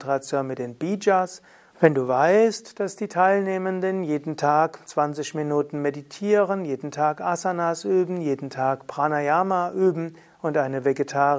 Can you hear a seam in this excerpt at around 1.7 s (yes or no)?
yes